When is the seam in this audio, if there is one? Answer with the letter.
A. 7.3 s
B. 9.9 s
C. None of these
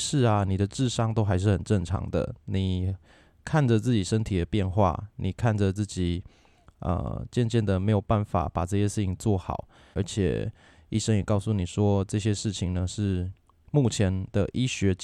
B